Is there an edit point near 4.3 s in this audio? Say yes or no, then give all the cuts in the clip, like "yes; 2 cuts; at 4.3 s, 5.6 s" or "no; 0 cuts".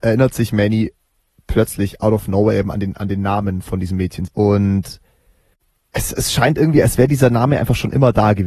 yes; 2 cuts; at 4.3 s, 6.1 s